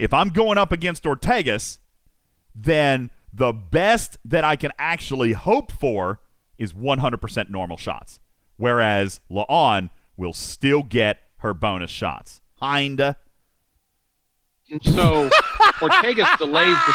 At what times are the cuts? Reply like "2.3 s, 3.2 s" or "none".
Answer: 12.6 s, 14.8 s